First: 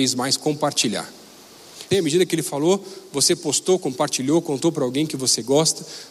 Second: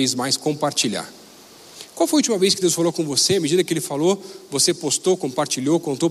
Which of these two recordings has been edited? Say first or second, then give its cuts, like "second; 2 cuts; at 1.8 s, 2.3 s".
first; 1 cut; at 1.9 s